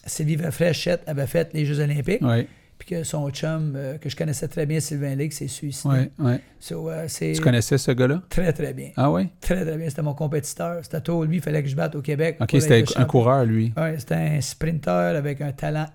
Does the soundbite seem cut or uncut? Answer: uncut